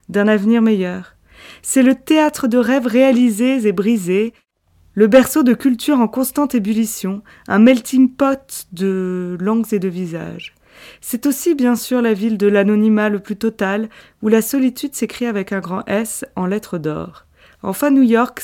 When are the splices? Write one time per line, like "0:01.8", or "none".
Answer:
none